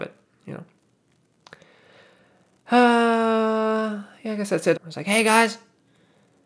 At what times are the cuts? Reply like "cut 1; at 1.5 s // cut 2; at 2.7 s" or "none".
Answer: cut 1; at 4.7 s